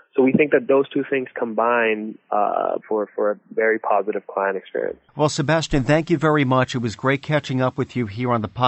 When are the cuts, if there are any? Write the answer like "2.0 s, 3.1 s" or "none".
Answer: 2.8 s